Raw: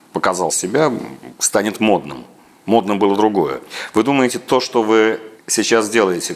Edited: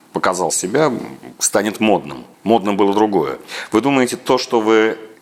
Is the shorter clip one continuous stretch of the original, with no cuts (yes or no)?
no